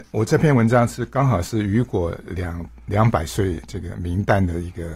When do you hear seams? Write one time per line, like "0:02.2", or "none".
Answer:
none